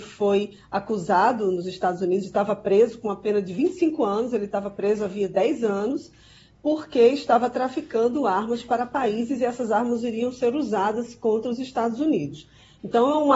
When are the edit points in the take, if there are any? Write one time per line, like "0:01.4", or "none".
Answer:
none